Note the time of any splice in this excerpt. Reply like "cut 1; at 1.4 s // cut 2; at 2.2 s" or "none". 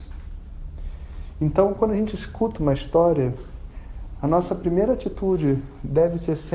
none